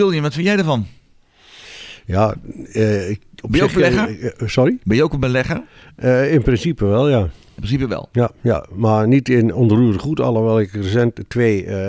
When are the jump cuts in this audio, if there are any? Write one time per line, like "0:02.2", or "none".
none